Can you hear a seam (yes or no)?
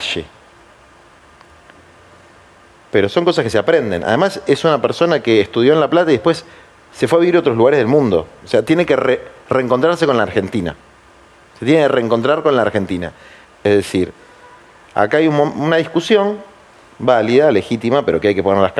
yes